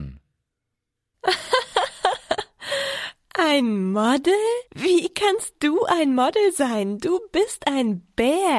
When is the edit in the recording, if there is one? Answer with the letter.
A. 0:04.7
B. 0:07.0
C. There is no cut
A